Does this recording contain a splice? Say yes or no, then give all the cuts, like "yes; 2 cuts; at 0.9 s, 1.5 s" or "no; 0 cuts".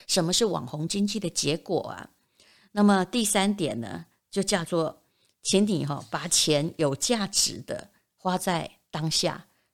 no; 0 cuts